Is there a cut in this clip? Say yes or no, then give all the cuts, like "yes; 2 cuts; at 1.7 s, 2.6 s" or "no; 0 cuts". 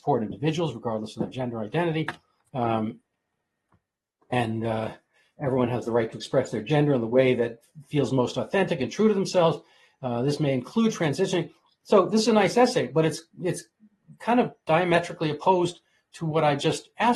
no; 0 cuts